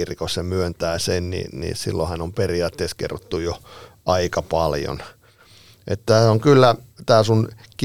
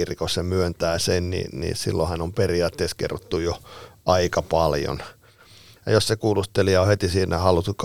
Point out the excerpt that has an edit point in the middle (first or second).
second